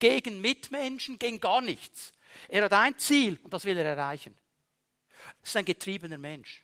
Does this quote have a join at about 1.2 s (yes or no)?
yes